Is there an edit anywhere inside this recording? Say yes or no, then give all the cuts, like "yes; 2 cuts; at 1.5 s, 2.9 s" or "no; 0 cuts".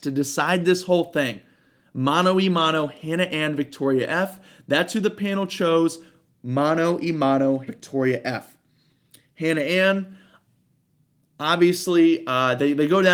yes; 1 cut; at 7.7 s